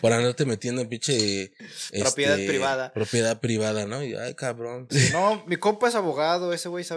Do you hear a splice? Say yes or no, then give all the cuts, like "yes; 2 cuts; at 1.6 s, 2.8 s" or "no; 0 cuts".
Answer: yes; 1 cut; at 4.9 s